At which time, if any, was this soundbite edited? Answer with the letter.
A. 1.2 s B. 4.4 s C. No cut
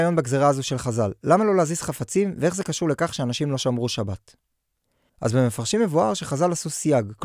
C